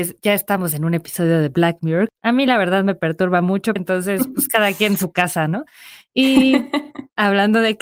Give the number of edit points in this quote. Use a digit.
1